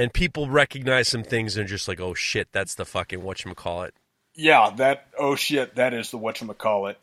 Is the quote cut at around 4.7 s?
no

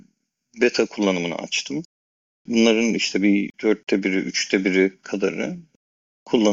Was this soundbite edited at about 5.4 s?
no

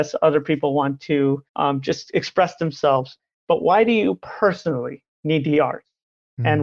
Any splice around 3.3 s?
no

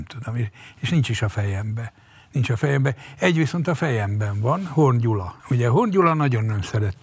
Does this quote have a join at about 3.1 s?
no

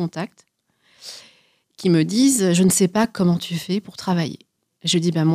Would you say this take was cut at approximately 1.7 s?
no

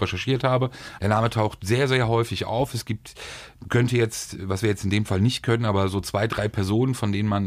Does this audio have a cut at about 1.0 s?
yes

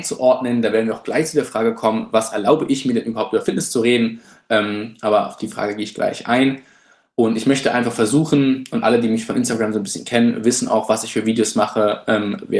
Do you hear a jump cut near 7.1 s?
no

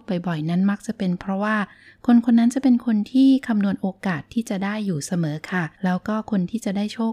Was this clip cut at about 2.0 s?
no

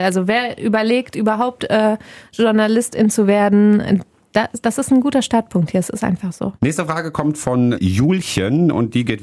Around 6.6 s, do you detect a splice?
yes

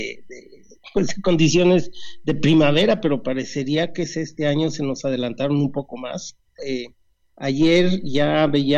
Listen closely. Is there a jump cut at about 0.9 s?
no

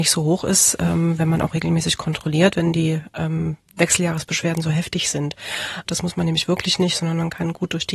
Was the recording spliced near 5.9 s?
yes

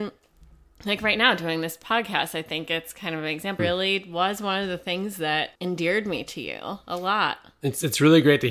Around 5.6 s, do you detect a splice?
yes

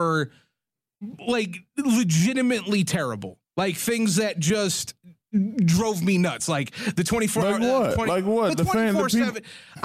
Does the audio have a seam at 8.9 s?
no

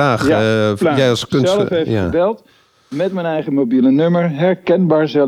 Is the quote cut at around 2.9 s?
no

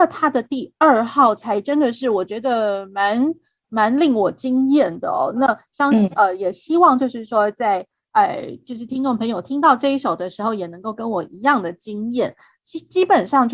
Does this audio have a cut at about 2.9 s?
no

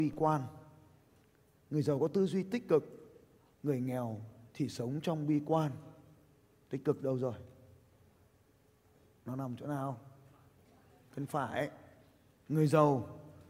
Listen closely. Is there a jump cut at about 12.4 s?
yes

